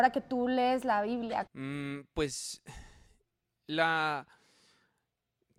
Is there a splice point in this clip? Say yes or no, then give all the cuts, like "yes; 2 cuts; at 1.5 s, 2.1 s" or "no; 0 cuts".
yes; 1 cut; at 1.5 s